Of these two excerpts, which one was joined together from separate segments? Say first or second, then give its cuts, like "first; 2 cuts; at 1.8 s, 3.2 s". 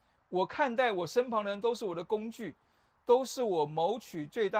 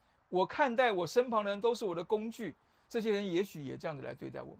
second; 1 cut; at 2.8 s